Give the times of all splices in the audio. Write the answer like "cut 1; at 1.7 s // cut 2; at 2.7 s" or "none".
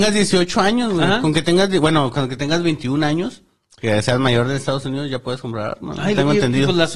none